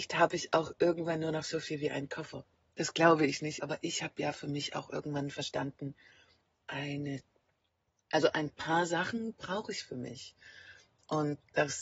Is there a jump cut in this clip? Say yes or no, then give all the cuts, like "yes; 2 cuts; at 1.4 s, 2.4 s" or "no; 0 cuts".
yes; 1 cut; at 3.6 s